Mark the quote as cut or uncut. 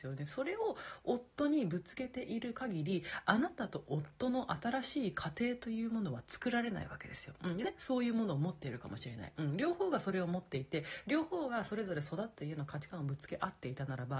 cut